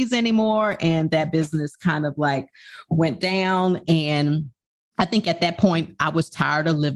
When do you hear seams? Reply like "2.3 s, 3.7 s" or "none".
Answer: none